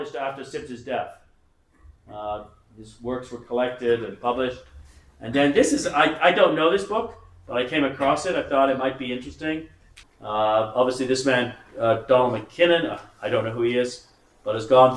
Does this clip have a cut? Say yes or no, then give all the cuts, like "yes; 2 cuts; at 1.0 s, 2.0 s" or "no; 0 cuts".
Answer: yes; 1 cut; at 10.0 s